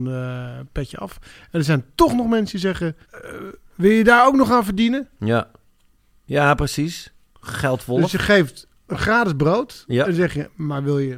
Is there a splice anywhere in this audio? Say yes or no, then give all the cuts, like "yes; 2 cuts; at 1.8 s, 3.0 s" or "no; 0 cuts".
yes; 1 cut; at 3.0 s